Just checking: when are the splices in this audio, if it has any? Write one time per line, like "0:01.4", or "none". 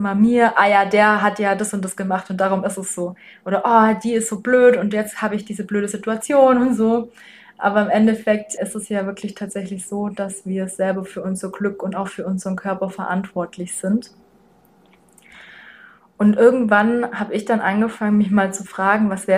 0:08.6